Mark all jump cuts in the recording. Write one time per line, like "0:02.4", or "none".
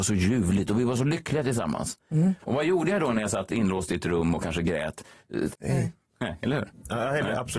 0:02.4
0:05.5